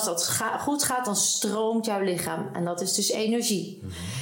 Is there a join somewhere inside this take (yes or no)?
no